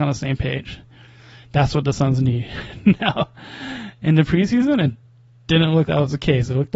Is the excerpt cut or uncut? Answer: cut